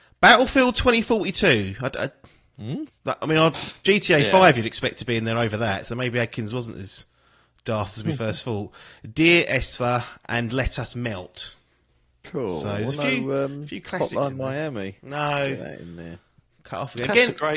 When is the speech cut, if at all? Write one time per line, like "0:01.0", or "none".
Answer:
0:03.5